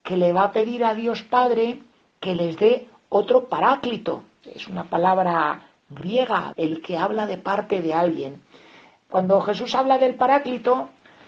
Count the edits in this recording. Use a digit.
2